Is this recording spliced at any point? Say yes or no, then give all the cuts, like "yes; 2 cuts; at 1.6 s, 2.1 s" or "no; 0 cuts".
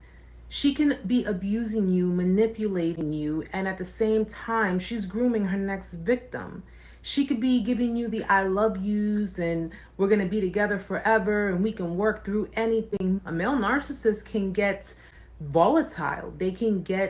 yes; 1 cut; at 13.2 s